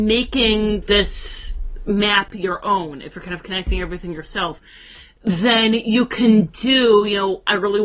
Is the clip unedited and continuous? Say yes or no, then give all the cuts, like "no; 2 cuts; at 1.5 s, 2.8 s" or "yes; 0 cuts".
yes; 0 cuts